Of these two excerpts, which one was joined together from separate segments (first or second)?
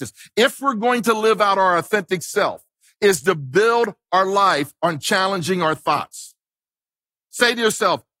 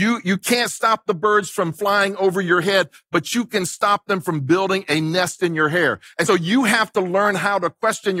second